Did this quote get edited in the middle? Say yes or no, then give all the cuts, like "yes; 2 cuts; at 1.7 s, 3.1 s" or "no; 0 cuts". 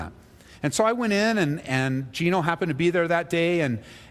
no; 0 cuts